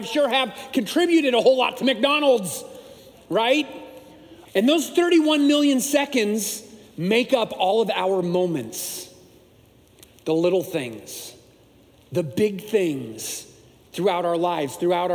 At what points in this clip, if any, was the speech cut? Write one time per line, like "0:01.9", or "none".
0:04.5